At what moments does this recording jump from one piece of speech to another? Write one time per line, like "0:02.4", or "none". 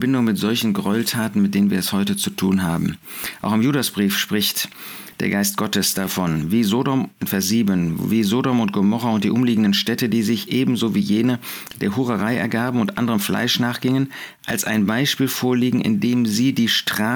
none